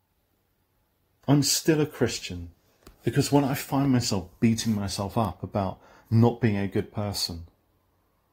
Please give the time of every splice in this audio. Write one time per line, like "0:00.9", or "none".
0:01.2
0:02.9